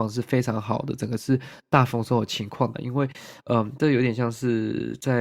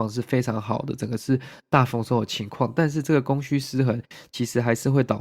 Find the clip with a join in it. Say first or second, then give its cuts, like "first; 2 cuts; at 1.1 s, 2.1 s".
first; 1 cut; at 2.7 s